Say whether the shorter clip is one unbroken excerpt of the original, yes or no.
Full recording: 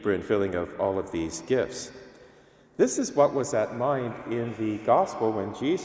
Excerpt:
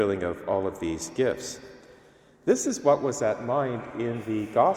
yes